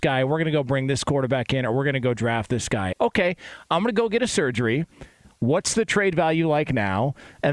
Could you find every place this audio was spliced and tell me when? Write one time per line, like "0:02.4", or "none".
0:02.9